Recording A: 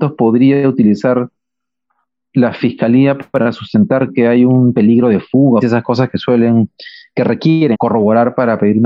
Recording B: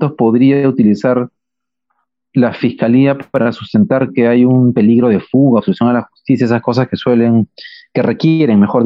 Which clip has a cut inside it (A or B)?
A